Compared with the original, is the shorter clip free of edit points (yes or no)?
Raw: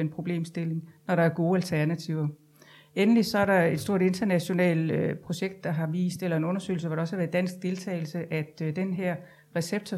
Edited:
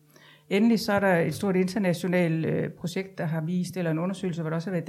yes